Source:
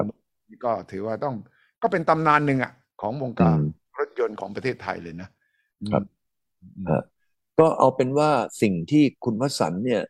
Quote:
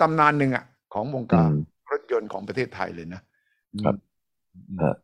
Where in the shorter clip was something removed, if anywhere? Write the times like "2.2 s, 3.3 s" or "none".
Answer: none